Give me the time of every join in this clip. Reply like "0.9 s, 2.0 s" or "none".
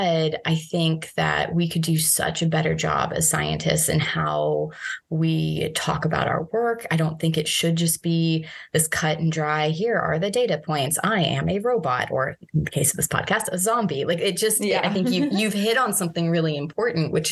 none